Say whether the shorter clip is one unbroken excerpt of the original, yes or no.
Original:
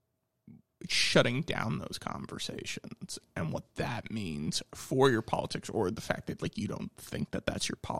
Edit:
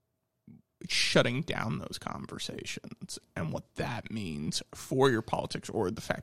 yes